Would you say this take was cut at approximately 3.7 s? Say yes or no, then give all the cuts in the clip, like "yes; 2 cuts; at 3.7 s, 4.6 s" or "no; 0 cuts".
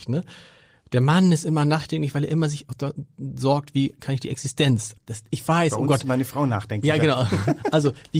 no; 1 cut; at 5.0 s